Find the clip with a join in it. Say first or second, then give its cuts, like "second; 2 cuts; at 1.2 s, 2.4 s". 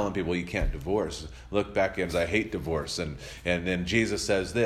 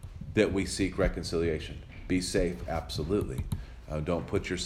first; 1 cut; at 2.1 s